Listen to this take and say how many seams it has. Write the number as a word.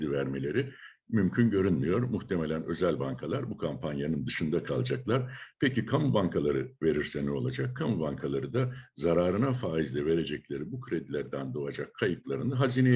zero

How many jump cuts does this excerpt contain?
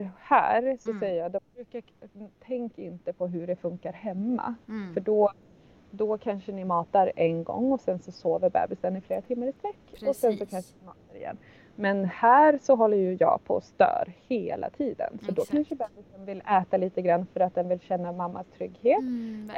zero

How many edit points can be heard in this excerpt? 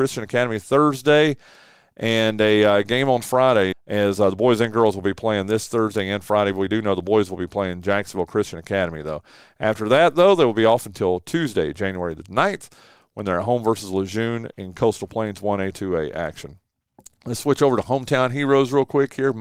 one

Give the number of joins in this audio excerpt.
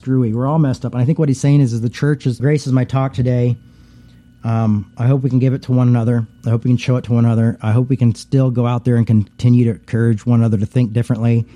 one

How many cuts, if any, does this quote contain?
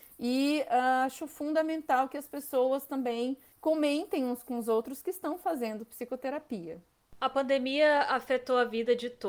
zero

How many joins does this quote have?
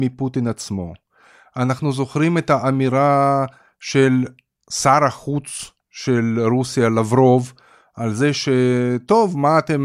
zero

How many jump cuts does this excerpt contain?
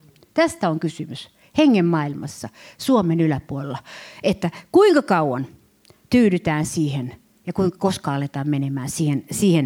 zero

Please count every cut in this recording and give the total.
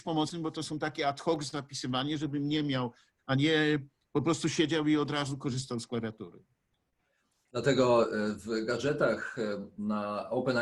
one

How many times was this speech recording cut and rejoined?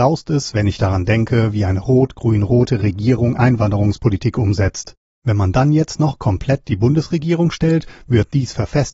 one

